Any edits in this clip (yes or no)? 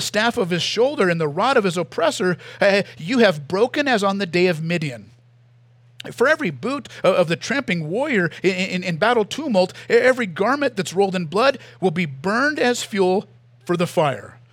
no